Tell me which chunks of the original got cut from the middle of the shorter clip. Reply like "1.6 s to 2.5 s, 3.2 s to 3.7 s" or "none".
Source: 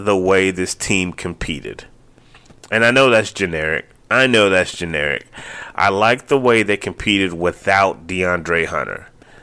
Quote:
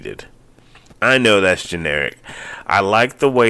2.5 s to 4.0 s